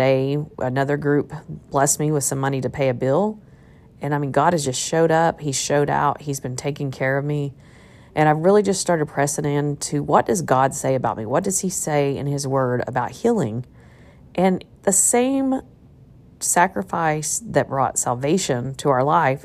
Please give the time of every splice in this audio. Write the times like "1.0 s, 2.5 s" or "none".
none